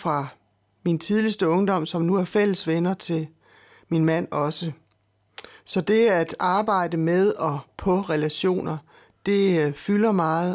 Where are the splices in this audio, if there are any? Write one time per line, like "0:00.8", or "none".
none